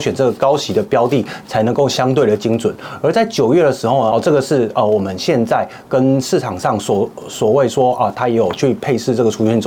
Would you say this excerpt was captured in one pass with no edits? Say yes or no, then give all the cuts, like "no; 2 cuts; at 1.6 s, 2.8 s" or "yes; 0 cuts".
no; 1 cut; at 4.1 s